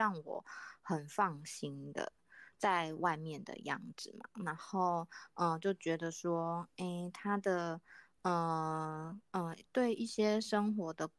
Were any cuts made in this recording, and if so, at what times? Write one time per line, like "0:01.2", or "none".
0:02.5